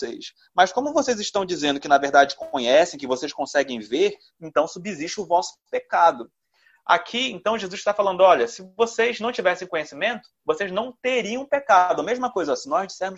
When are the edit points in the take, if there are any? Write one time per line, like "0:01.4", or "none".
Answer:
none